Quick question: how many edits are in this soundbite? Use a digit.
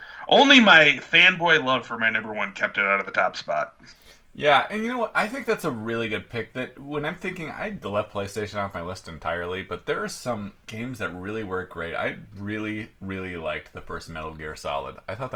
1